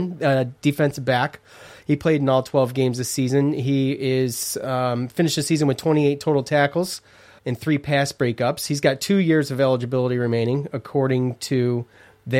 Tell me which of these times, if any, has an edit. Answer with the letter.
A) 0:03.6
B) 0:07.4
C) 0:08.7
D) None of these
B